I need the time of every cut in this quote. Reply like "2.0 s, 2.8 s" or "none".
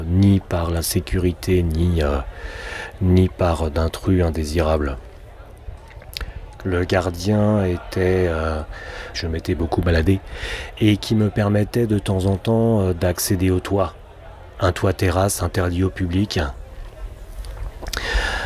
6.6 s, 9.1 s